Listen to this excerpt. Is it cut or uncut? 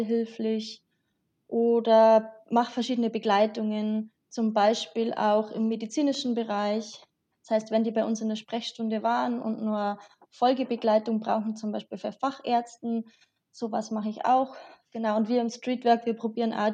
uncut